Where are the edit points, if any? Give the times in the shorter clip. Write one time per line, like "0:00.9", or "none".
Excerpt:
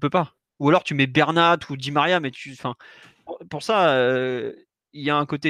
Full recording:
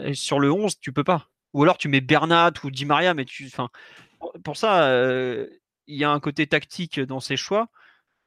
none